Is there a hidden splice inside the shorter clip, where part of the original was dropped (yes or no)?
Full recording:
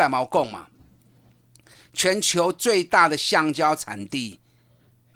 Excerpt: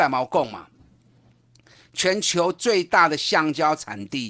no